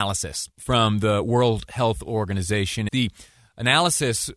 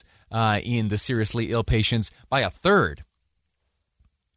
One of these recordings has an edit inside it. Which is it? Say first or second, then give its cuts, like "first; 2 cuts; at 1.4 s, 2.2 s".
first; 1 cut; at 2.9 s